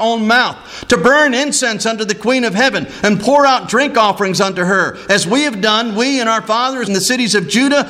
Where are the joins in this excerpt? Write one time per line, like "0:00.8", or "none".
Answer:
0:06.9